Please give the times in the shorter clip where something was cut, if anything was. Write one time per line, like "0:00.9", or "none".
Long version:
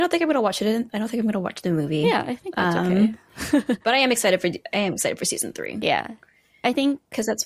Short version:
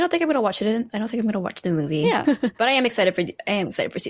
0:02.2